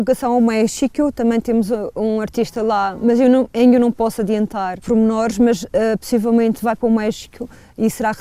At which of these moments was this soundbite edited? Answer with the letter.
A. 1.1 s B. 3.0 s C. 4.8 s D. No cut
C